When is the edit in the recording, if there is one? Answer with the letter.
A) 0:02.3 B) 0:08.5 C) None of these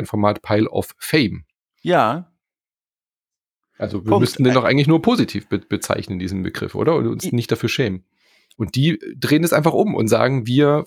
B